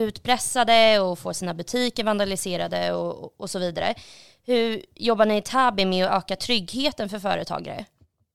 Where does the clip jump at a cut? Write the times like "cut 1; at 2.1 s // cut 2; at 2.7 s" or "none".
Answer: none